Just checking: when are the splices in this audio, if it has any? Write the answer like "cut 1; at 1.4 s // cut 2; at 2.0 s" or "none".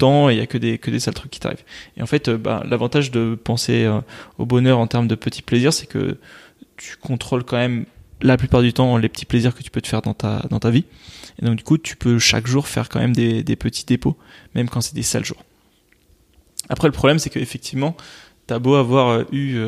none

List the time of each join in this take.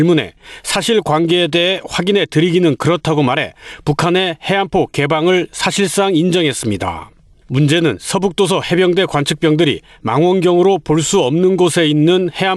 cut 1; at 7.4 s

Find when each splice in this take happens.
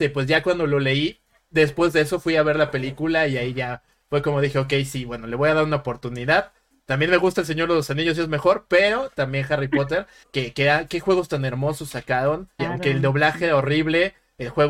cut 1; at 10.2 s // cut 2; at 12.6 s

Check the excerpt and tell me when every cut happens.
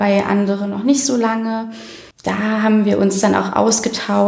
cut 1; at 2.1 s

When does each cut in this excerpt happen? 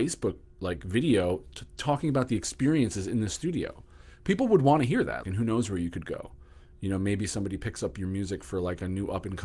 cut 1; at 5.2 s

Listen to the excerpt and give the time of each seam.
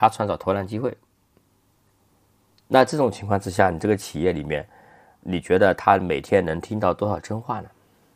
none

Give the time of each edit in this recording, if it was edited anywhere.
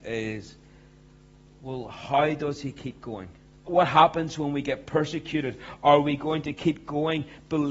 cut 1; at 3.7 s

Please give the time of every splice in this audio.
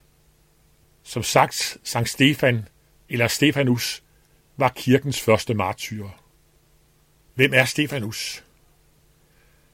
cut 1; at 7.2 s

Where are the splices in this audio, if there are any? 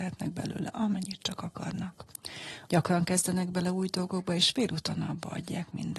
cut 1; at 2.6 s

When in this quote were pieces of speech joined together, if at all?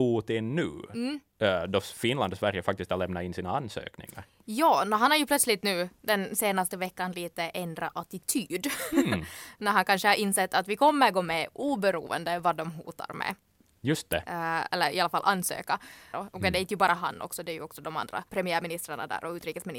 cut 1; at 16.1 s // cut 2; at 18.3 s

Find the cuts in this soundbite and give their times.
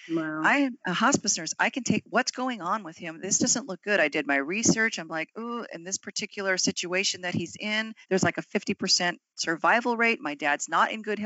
cut 1; at 8.0 s

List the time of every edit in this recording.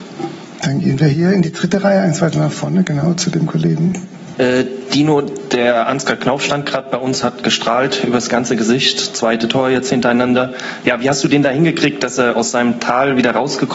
cut 1; at 4.3 s

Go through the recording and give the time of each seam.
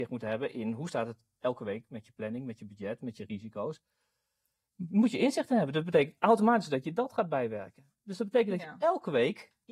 none

